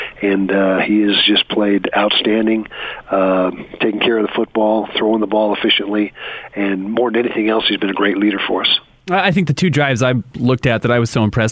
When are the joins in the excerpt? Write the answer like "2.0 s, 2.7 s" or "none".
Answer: none